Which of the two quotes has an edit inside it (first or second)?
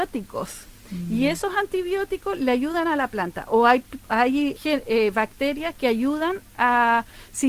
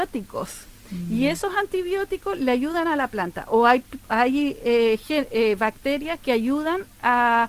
first